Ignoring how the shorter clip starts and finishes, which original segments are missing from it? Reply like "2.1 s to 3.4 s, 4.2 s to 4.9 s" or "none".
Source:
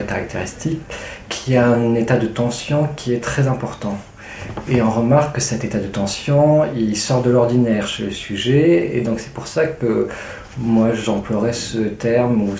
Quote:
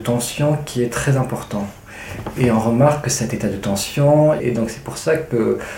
6.7 s to 8.9 s